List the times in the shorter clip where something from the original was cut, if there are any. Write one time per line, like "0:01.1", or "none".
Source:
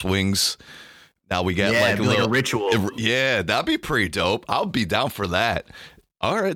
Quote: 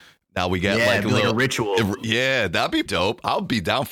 0:02.9